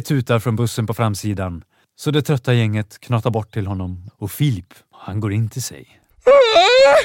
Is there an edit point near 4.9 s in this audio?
yes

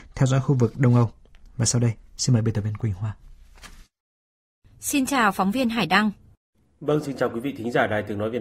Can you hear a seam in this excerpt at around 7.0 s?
yes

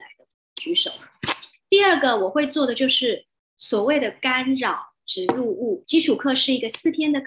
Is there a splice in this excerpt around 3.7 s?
no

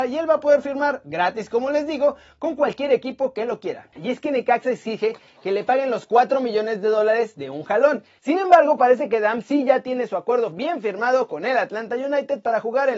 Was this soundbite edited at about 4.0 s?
yes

